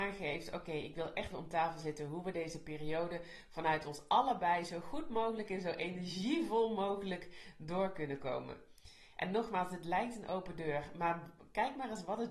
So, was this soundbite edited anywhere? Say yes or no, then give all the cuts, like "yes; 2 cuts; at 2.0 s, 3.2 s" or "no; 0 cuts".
yes; 1 cut; at 1.3 s